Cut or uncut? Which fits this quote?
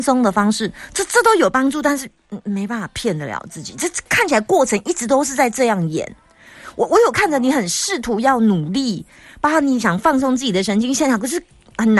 uncut